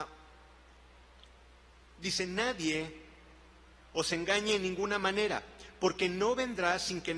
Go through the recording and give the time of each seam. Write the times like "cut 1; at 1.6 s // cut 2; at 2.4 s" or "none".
none

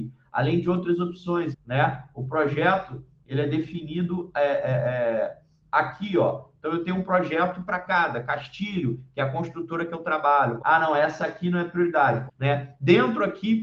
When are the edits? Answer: cut 1; at 1.5 s // cut 2; at 10.6 s // cut 3; at 12.3 s

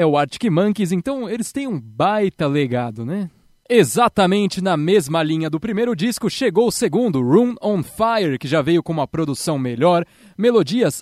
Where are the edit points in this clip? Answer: none

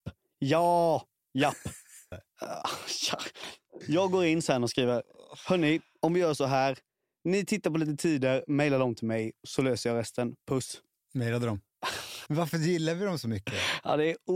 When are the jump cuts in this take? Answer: cut 1; at 2.1 s // cut 2; at 12.3 s

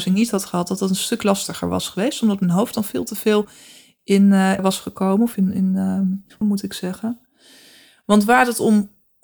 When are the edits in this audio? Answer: cut 1; at 4.6 s // cut 2; at 6.4 s

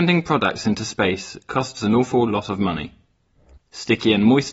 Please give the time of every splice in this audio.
cut 1; at 3.6 s

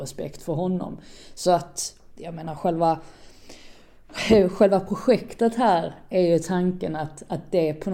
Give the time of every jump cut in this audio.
none

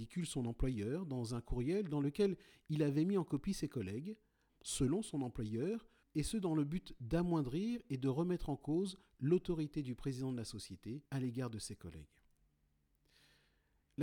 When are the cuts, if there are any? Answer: cut 1; at 4.5 s // cut 2; at 6.0 s // cut 3; at 11.1 s

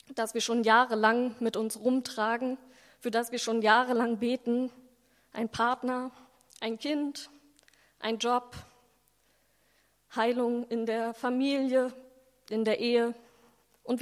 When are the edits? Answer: none

